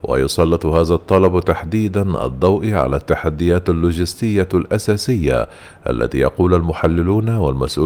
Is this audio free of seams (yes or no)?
yes